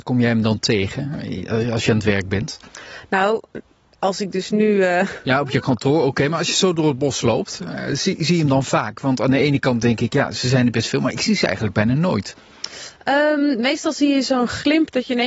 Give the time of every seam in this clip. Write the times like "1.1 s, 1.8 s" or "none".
none